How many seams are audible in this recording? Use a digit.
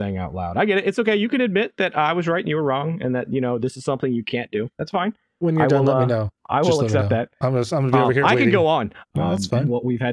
1